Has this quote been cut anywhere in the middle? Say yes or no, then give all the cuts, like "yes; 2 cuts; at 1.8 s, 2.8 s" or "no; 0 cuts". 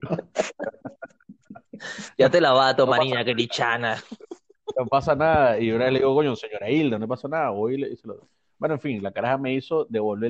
no; 0 cuts